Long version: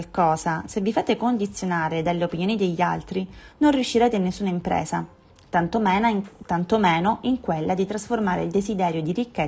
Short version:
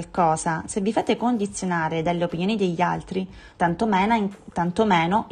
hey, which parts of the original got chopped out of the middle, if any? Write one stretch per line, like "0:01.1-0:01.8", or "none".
0:03.5-0:05.5